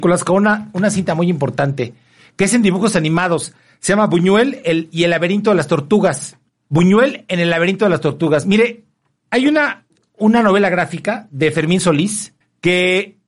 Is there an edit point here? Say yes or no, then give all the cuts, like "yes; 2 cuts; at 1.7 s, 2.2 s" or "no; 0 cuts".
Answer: no; 0 cuts